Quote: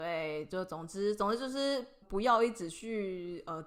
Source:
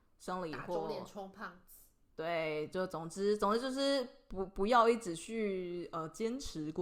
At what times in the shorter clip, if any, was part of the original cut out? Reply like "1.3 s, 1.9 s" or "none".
2.0 s